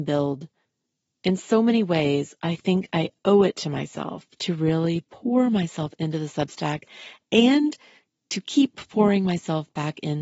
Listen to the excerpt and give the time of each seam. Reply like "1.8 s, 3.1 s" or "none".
none